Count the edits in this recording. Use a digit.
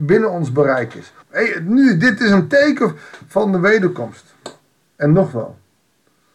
1